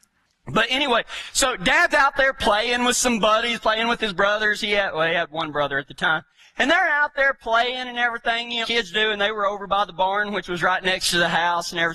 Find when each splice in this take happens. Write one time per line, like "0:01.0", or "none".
0:08.6